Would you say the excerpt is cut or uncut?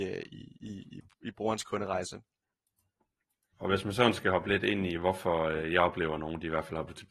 cut